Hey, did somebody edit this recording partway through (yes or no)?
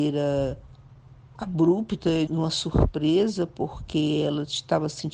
yes